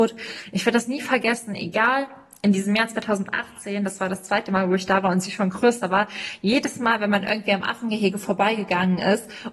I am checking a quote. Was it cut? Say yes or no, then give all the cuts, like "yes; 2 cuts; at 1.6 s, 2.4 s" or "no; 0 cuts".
no; 0 cuts